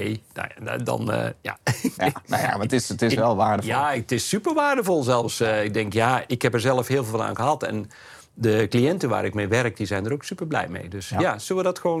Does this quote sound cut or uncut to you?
uncut